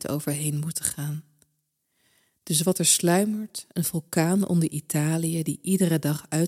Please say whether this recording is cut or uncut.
uncut